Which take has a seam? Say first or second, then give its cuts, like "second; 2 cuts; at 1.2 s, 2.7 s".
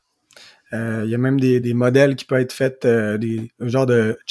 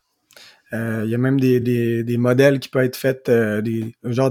first; 1 cut; at 1.6 s